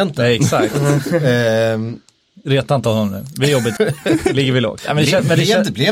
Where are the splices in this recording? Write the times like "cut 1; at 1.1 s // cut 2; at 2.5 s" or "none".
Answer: cut 1; at 3.8 s